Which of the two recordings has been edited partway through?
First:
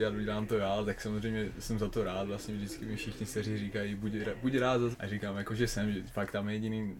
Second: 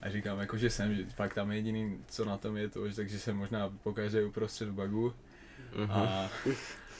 first; 1 cut; at 4.9 s

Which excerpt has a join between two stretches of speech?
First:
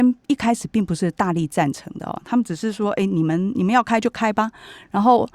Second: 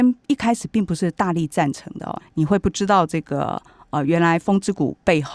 second; 1 cut; at 2.2 s

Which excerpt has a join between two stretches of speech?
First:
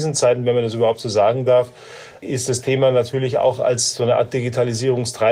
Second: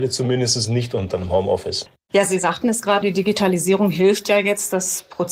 second; 1 cut; at 3.0 s

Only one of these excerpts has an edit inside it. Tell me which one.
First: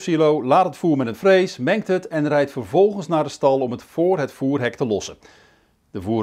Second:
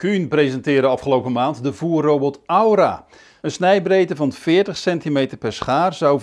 second; 1 cut; at 3.4 s

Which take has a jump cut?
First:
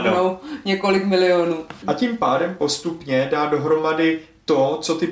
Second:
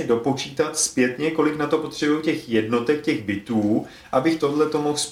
first; 1 cut; at 1.8 s

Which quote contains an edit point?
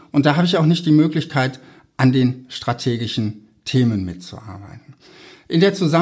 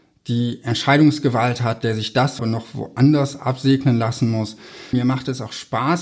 second; 2 cuts; at 2.4 s, 4.9 s

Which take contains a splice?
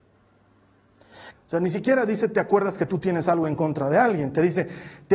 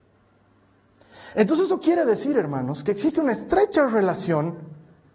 first; 1 cut; at 1.3 s

